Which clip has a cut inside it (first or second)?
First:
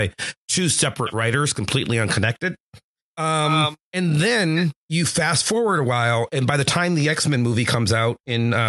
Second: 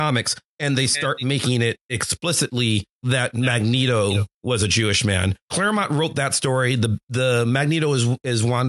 second